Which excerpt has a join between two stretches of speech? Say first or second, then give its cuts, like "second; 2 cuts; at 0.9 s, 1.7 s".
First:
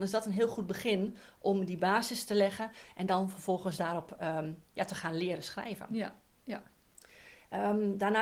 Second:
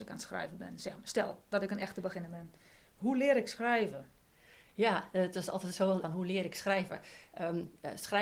second; 1 cut; at 6.0 s